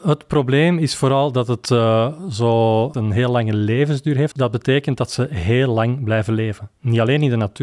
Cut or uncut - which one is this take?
cut